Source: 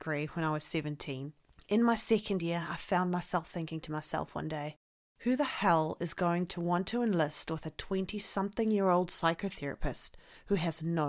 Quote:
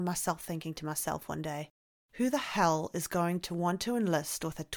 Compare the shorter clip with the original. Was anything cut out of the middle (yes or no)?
no